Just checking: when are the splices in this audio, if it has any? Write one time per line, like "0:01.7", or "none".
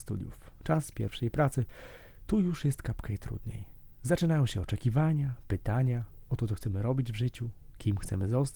none

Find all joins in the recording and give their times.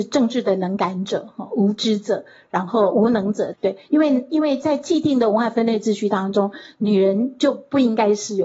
0:03.5

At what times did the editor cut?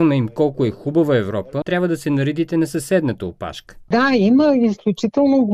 0:01.6
0:03.9

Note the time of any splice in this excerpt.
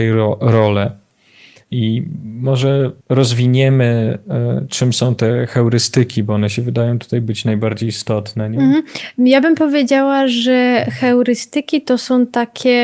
0:03.0

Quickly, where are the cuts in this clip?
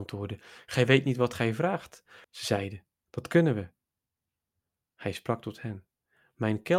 0:02.2

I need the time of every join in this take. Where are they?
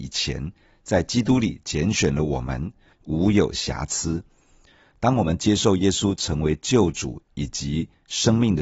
0:02.9

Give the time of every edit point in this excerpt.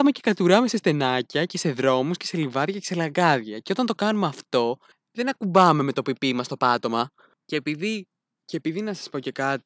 0:07.4

